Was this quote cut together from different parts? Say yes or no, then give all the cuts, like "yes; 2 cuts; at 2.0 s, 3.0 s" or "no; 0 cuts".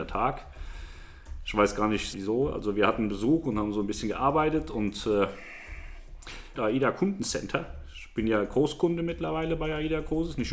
yes; 2 cuts; at 2.1 s, 6.6 s